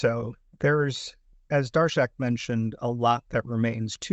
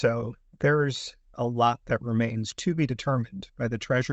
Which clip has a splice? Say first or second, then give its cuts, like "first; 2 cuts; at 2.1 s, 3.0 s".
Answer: second; 1 cut; at 1.3 s